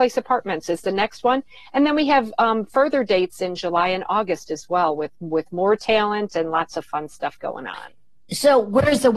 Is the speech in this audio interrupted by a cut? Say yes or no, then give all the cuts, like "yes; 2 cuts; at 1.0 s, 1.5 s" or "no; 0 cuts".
no; 0 cuts